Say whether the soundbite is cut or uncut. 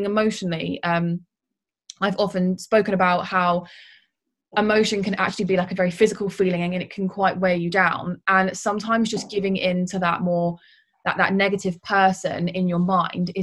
uncut